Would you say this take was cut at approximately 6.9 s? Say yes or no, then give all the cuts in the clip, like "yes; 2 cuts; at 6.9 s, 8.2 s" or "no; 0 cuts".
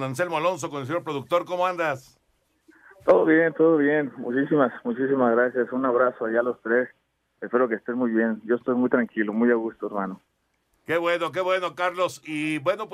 no; 0 cuts